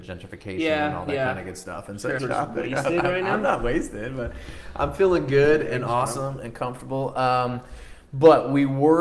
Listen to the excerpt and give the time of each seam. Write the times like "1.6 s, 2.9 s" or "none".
2.2 s